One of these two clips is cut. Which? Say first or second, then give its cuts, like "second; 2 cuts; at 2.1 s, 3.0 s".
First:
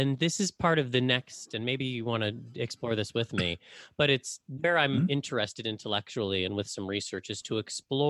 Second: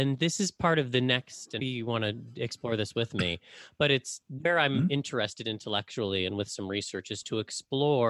second; 1 cut; at 1.6 s